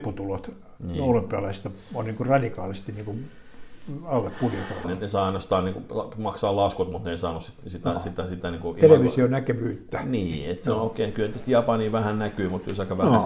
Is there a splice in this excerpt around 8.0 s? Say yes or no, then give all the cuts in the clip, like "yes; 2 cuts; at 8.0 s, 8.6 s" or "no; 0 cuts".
no; 1 cut; at 4.8 s